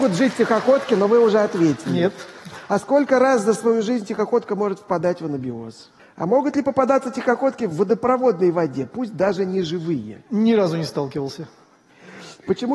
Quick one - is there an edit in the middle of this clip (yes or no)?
yes